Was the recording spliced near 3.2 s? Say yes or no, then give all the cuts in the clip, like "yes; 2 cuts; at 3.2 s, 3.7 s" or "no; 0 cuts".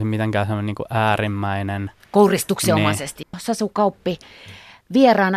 yes; 1 cut; at 3.2 s